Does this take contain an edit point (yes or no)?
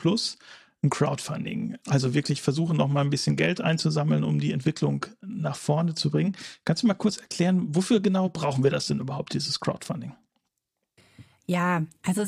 no